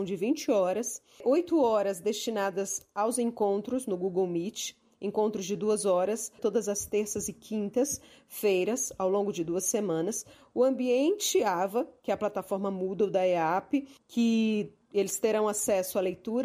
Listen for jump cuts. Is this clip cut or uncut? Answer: cut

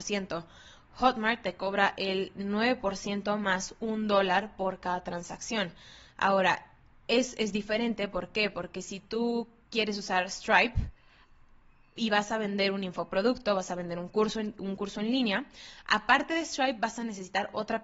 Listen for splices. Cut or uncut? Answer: uncut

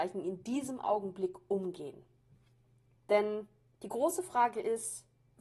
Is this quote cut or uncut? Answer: cut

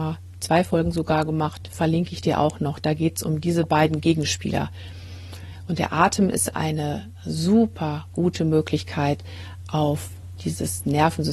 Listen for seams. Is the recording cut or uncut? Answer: uncut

